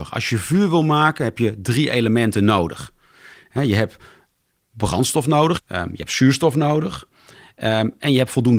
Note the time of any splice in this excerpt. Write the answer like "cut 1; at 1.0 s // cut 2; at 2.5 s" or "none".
cut 1; at 5.6 s